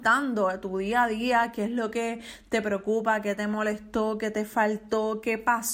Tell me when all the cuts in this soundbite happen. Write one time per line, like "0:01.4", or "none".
none